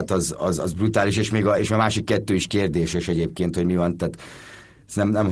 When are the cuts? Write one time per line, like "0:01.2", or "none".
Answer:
none